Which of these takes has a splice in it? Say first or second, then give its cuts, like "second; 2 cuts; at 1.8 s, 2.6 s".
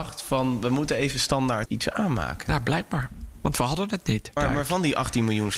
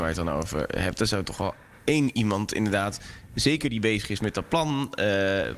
first; 2 cuts; at 1.7 s, 4.4 s